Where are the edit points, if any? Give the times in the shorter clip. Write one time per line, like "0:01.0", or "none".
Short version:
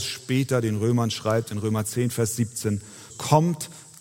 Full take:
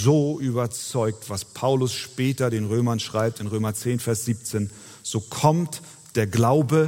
0:03.1